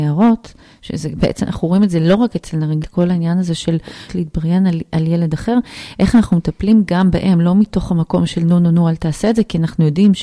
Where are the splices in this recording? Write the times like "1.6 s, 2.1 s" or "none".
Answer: 2.8 s, 4.1 s